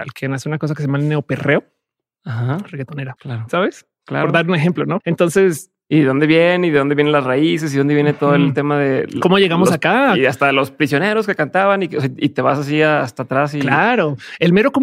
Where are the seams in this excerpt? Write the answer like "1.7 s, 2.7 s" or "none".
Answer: 3.2 s, 5.0 s